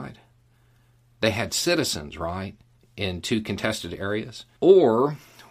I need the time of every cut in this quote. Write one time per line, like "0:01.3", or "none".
0:04.6